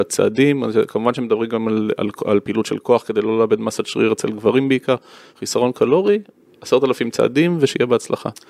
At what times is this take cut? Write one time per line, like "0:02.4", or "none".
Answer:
0:05.3